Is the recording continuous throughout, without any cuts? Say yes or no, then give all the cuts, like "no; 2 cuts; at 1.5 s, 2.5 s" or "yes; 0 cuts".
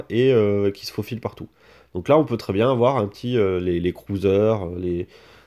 yes; 0 cuts